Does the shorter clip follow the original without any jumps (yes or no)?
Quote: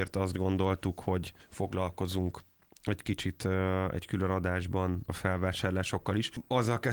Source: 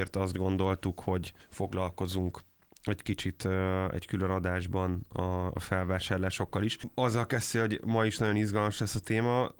no